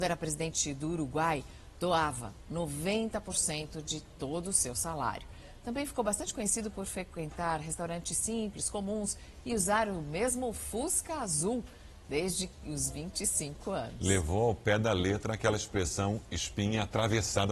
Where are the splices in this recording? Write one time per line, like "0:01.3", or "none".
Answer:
none